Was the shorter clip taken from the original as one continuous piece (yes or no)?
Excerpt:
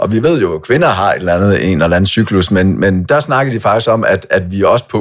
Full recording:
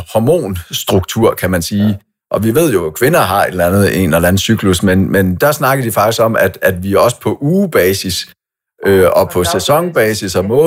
yes